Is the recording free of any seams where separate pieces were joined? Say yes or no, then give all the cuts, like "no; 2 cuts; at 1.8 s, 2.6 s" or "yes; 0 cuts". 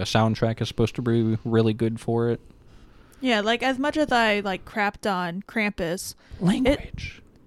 yes; 0 cuts